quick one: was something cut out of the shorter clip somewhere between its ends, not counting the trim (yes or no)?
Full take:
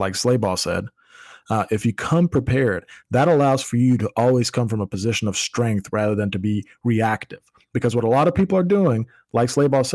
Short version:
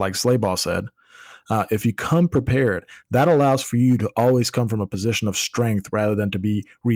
no